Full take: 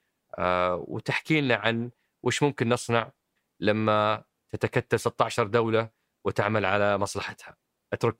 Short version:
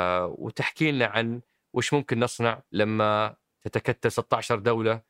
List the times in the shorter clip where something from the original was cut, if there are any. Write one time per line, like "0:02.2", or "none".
0:02.7